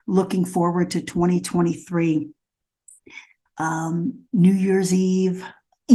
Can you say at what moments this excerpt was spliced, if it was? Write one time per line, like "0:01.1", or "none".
0:03.5